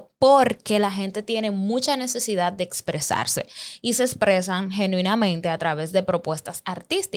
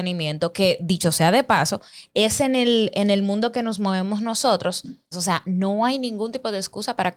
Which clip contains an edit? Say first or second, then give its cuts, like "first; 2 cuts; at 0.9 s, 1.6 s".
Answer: second; 1 cut; at 5.1 s